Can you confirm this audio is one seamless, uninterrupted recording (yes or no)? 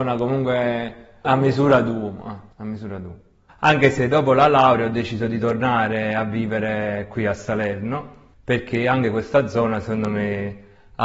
no